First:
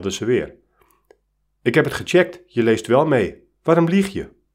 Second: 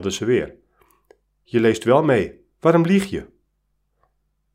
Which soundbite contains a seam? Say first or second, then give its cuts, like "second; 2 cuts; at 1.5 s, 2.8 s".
second; 1 cut; at 1.4 s